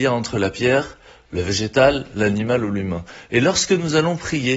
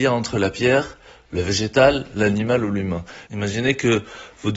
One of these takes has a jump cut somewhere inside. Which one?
second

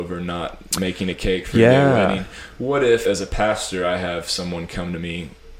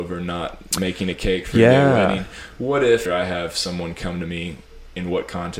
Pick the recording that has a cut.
second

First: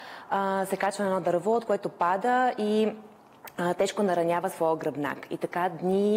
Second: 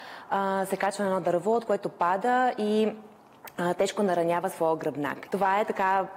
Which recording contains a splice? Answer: second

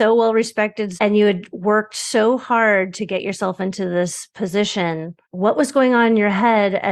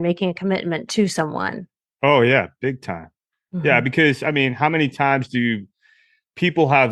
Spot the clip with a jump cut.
first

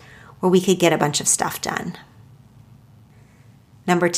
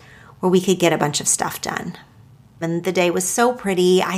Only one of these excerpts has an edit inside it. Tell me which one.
second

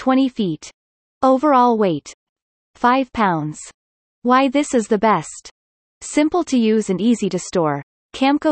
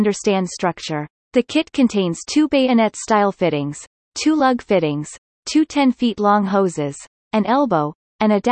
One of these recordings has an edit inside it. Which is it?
second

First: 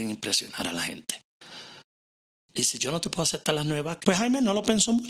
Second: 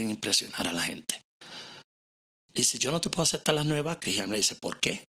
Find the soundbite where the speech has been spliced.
first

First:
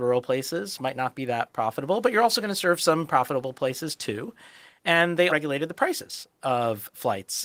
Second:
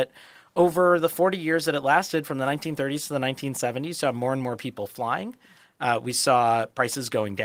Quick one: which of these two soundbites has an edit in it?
first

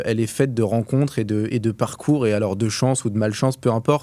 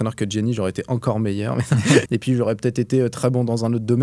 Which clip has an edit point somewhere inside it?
second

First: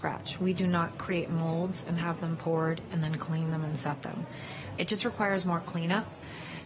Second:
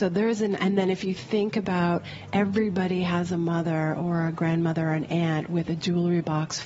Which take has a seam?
first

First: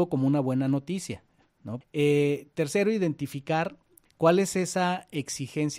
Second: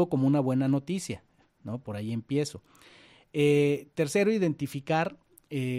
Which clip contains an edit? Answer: first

